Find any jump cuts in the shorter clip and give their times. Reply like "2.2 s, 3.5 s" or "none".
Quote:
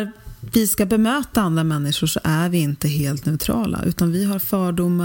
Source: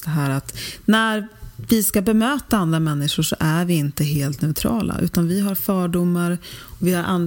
none